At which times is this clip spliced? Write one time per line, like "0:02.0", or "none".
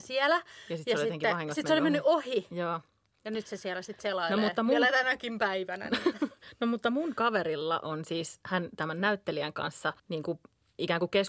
0:10.0